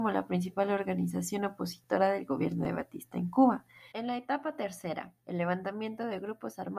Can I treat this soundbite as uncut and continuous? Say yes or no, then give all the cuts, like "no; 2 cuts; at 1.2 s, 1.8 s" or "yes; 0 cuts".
no; 1 cut; at 3.9 s